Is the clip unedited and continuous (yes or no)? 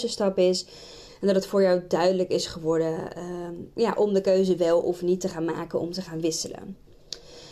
no